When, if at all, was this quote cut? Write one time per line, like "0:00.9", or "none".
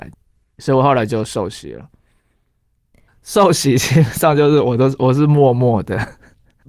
0:03.1